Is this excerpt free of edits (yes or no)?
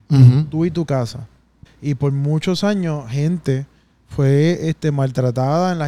no